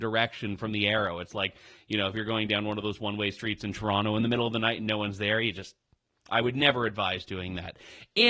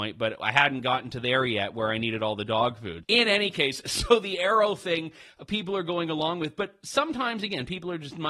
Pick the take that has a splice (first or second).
second